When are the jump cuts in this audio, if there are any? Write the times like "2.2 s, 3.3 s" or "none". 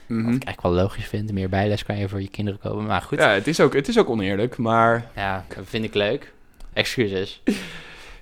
5.5 s, 6.7 s